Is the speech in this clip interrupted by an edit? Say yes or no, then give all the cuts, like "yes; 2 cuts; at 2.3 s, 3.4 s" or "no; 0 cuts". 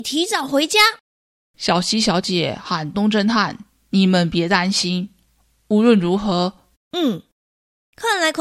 yes; 2 cuts; at 2.9 s, 6.7 s